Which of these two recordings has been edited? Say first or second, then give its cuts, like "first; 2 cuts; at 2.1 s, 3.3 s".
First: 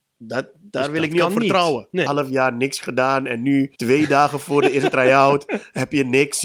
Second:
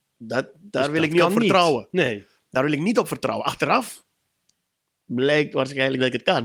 first; 2 cuts; at 2.1 s, 3.8 s